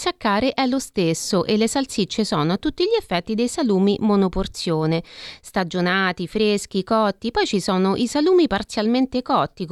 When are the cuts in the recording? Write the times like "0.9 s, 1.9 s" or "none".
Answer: none